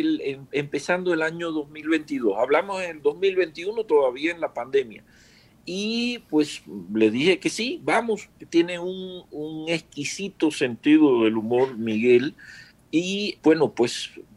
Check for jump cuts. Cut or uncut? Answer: cut